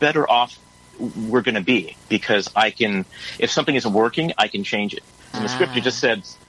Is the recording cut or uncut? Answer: cut